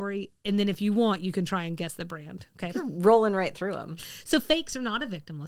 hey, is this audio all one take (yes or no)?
no